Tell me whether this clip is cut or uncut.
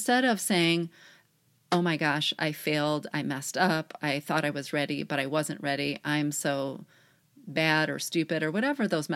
uncut